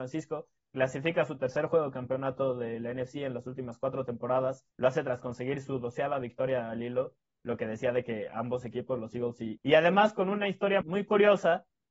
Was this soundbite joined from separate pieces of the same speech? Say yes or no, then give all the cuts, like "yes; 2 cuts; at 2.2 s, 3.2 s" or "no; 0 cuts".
yes; 3 cuts; at 4.7 s, 9.6 s, 10.8 s